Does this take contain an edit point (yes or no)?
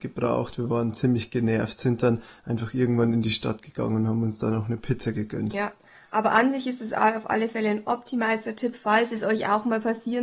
no